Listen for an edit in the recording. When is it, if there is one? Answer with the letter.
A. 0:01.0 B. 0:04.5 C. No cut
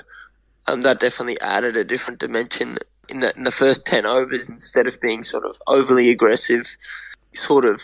C